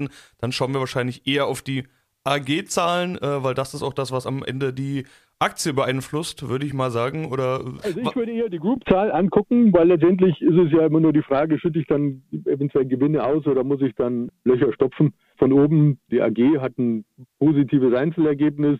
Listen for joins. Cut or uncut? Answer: uncut